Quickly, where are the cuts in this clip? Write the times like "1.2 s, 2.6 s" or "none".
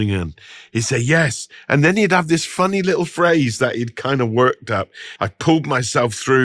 5.2 s